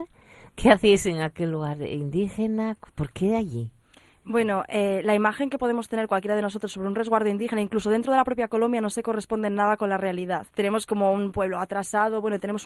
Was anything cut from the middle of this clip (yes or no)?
yes